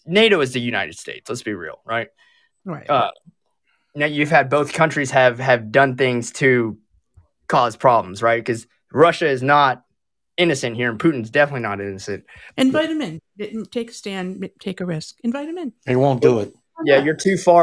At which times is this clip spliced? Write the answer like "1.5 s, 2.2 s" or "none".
12.5 s